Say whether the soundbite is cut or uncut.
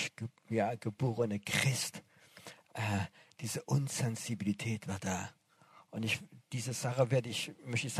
uncut